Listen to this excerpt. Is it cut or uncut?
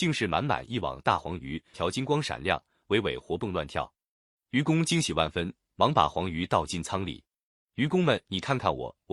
cut